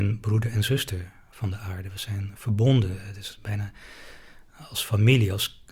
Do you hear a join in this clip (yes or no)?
no